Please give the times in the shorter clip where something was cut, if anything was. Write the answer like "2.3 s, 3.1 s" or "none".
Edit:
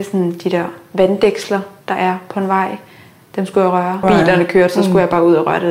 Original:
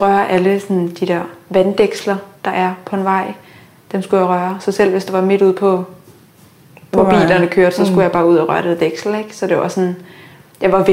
4.0 s